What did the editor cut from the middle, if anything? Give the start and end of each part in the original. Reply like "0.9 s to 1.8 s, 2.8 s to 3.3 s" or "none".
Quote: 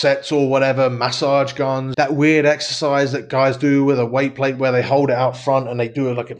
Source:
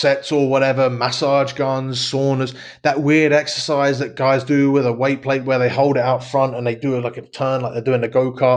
1.9 s to 2.8 s